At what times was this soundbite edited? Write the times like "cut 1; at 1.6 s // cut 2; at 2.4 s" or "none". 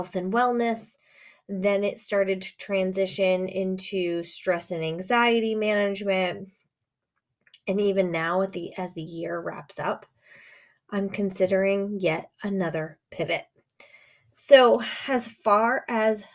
none